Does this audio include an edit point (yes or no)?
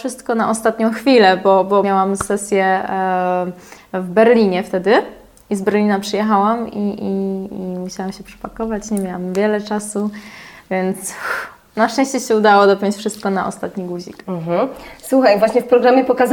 yes